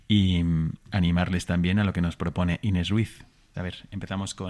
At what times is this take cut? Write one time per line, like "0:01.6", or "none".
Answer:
0:03.5